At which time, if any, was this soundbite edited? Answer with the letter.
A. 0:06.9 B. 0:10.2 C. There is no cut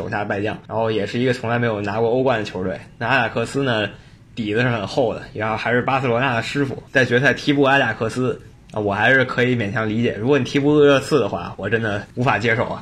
C